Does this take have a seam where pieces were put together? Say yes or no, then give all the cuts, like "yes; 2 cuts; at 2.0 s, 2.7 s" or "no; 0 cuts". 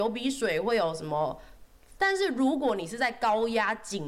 yes; 1 cut; at 2.0 s